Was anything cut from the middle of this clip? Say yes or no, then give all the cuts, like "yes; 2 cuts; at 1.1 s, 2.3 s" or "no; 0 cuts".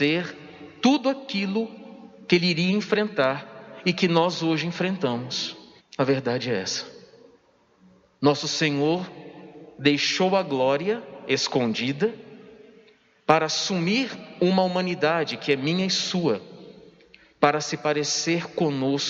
yes; 1 cut; at 5.8 s